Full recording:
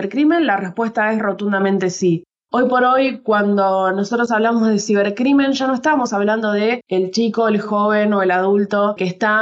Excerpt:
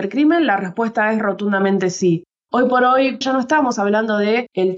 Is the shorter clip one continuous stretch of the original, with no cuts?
no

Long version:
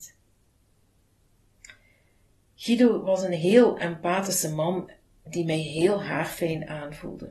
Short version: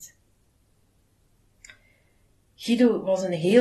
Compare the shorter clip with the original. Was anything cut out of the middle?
no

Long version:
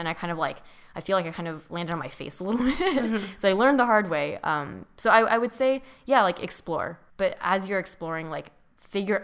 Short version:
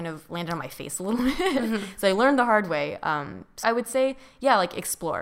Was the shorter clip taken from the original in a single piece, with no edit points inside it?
no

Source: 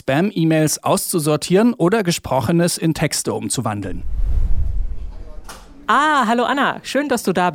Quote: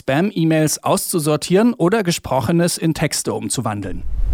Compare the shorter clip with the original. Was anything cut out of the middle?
no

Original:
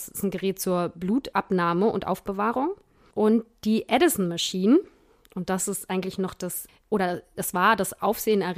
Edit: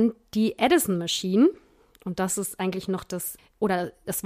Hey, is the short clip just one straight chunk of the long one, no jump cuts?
yes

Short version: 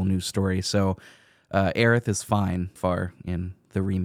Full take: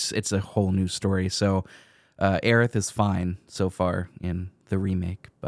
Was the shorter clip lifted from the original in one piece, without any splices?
no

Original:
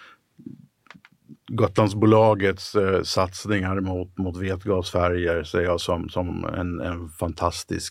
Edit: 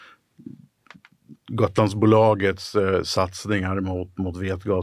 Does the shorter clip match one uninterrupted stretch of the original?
yes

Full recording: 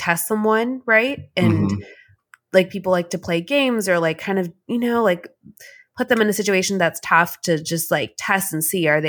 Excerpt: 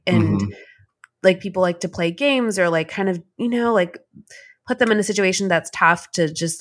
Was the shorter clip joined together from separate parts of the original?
no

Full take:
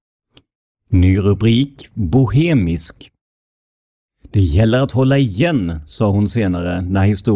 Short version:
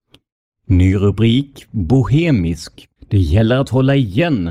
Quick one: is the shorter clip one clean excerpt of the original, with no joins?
no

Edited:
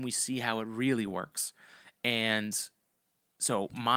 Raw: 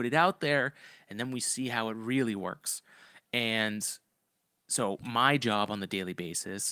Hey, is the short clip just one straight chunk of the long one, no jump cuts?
yes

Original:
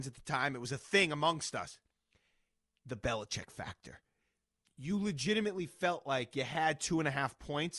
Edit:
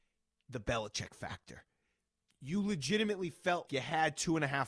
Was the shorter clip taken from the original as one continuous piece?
no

